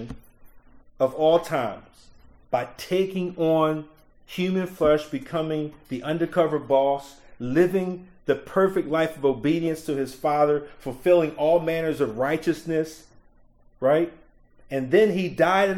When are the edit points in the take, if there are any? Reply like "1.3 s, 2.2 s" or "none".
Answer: 14.5 s